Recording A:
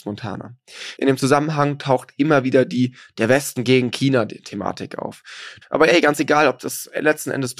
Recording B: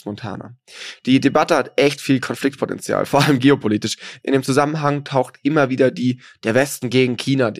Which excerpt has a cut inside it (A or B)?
A